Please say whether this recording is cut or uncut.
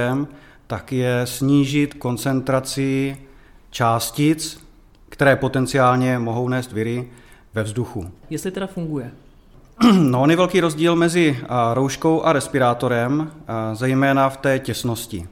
cut